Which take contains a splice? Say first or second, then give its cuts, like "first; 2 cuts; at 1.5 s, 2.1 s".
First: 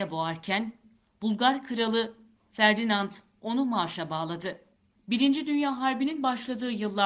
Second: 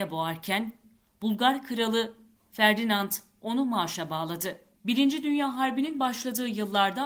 second; 1 cut; at 4.7 s